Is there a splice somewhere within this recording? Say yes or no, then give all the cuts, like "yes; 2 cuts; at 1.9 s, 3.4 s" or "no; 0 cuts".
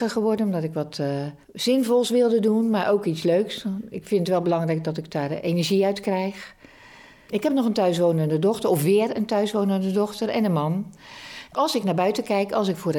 no; 0 cuts